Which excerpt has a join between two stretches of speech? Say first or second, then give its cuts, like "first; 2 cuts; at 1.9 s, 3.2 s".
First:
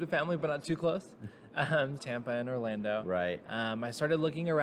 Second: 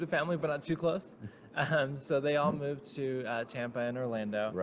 first; 1 cut; at 2.0 s